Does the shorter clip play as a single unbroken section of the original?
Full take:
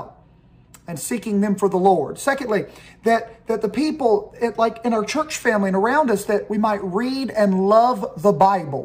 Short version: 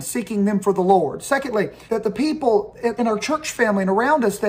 no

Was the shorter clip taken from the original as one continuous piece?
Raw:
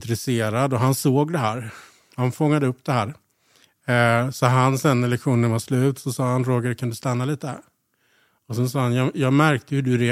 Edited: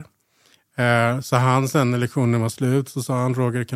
yes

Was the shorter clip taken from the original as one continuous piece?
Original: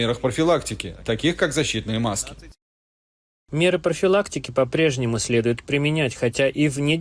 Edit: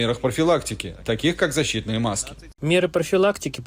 no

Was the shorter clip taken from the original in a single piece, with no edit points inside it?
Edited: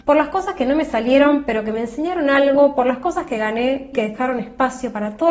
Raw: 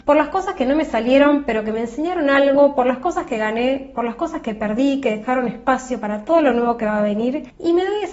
no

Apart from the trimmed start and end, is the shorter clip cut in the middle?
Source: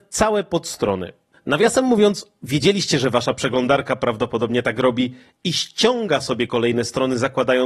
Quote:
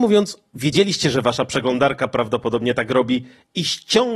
no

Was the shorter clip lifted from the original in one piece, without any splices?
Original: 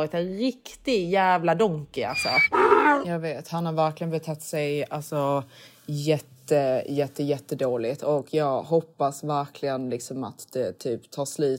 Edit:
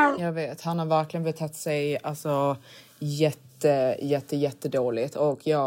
yes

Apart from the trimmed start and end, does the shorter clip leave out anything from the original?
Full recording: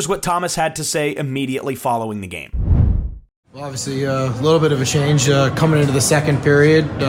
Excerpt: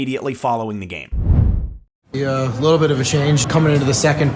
yes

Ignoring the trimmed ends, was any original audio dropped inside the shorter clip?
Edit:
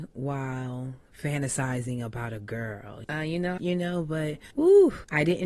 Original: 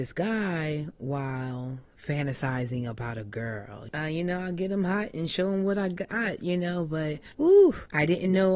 yes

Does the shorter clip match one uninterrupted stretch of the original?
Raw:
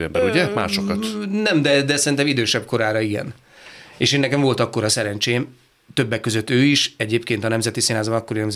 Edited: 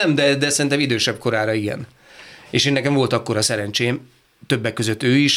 yes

